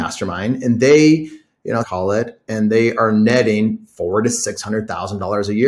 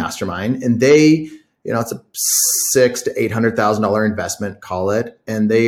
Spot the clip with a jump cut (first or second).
first